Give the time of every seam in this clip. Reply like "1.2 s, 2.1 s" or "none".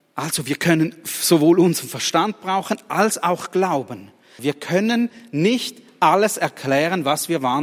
4.4 s